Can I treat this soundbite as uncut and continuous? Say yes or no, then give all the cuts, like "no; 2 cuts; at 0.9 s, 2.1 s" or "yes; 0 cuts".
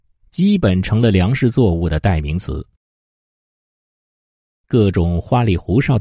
yes; 0 cuts